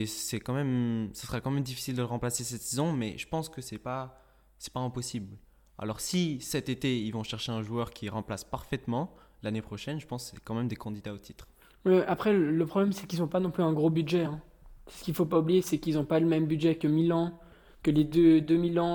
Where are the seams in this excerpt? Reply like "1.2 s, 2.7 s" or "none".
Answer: none